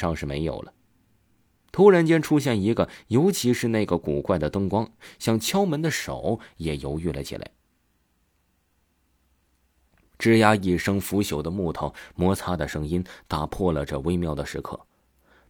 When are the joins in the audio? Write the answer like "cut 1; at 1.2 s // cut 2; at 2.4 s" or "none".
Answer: none